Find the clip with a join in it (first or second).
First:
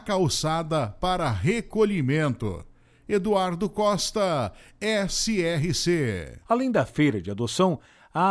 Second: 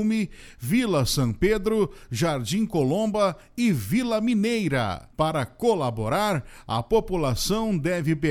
first